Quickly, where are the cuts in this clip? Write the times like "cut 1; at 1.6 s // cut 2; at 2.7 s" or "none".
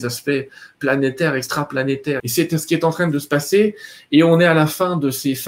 cut 1; at 2.2 s

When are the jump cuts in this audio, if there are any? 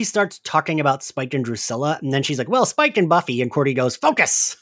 none

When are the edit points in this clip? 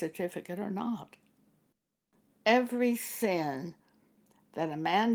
cut 1; at 2.3 s

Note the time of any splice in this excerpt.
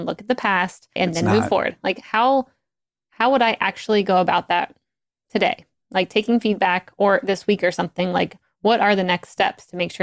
cut 1; at 1.0 s

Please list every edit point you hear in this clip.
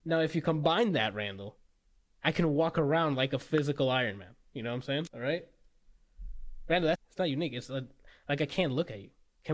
cut 1; at 5.1 s // cut 2; at 6.9 s

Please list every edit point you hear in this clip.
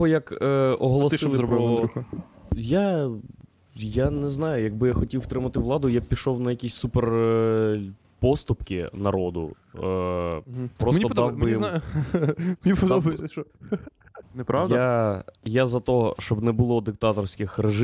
cut 1; at 14.2 s

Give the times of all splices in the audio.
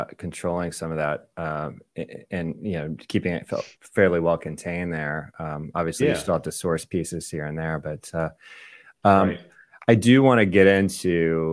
none

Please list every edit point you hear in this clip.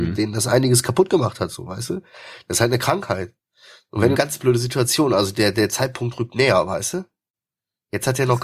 cut 1; at 4.2 s

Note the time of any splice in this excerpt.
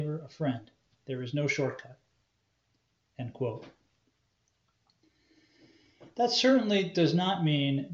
cut 1; at 0.9 s

